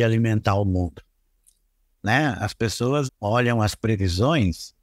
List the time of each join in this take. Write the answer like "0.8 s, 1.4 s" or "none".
3.1 s